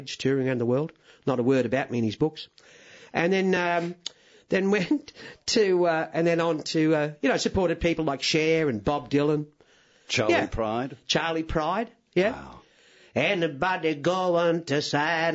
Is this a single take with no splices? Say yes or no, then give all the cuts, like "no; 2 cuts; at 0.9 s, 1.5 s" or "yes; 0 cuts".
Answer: yes; 0 cuts